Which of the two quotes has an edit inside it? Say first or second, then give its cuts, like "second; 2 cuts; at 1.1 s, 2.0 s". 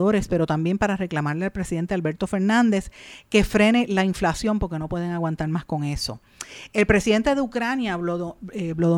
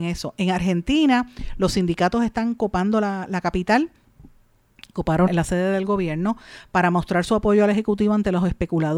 second; 1 cut; at 5.3 s